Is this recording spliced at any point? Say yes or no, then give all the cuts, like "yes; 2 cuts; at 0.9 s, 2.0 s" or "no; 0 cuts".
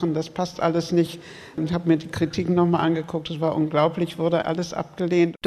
yes; 1 cut; at 4.4 s